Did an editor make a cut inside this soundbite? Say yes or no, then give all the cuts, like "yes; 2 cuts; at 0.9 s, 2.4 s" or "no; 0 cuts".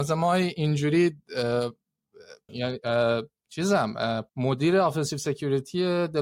yes; 2 cuts; at 2.5 s, 4.3 s